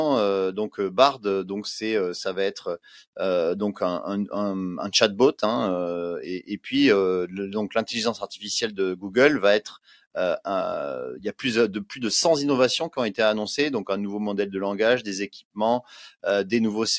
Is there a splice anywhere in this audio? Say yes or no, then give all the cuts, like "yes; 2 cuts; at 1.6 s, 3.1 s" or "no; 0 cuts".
no; 0 cuts